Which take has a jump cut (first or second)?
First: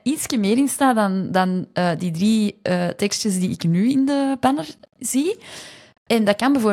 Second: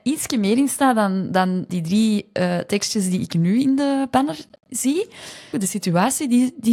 second